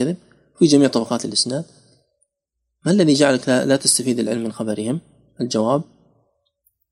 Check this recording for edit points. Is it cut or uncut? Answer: uncut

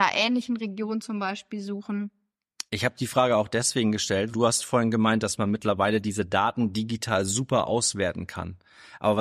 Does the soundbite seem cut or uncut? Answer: cut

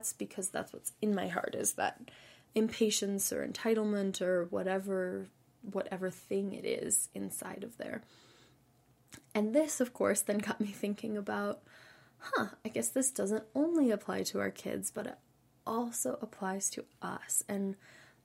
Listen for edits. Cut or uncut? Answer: uncut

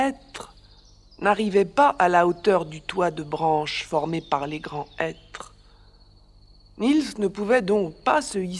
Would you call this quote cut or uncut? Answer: uncut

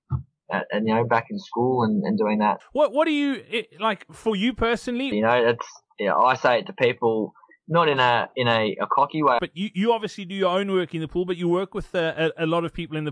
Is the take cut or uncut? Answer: cut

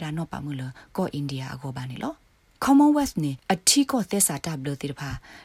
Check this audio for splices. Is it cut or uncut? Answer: uncut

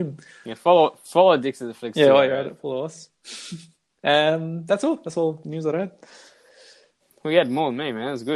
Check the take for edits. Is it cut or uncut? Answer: uncut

